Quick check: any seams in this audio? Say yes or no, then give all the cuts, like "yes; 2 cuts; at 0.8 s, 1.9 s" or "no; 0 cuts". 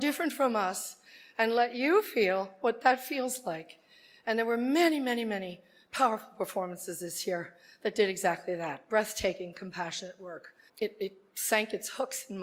yes; 1 cut; at 10.7 s